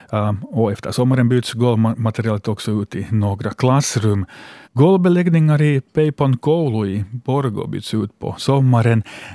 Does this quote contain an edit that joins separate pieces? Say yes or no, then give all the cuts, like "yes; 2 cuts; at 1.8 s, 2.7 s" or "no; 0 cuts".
yes; 1 cut; at 4.6 s